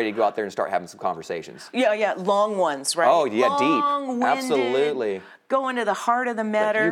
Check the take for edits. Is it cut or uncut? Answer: uncut